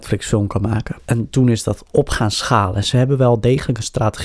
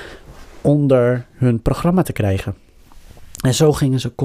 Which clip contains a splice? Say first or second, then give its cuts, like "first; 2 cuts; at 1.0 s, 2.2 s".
first; 1 cut; at 1.0 s